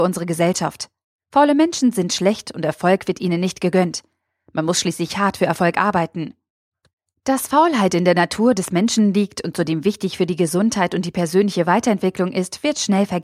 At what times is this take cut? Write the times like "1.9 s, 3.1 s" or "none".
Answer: 1.2 s